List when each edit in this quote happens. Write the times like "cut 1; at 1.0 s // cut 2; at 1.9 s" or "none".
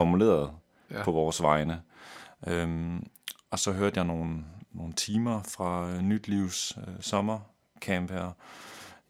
none